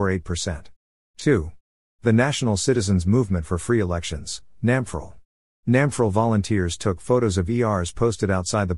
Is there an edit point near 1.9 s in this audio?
no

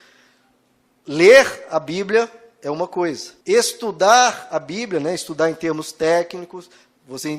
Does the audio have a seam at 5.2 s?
no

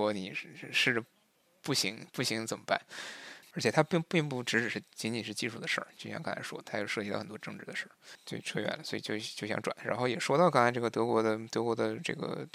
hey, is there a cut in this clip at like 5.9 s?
no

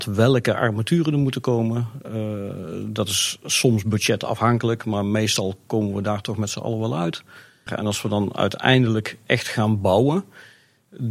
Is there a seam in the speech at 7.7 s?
yes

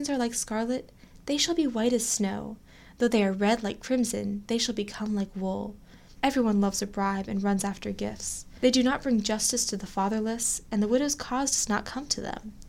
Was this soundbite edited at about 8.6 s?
no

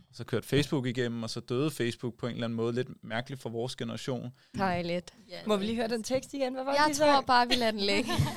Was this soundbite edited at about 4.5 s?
yes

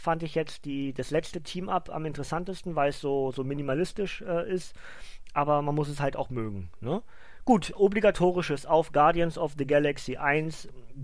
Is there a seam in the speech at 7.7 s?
yes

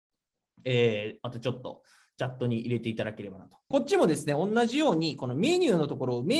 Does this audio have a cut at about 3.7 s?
yes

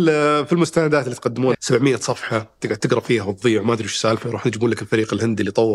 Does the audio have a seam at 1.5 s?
yes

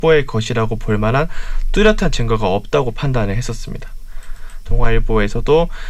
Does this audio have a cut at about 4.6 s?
yes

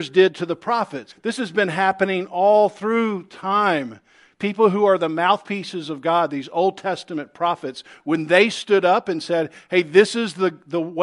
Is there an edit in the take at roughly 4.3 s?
no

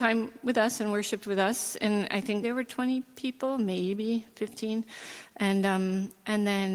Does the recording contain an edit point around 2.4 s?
yes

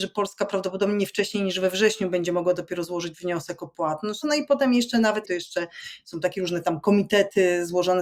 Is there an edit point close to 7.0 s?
no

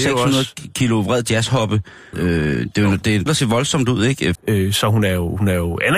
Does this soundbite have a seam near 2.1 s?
yes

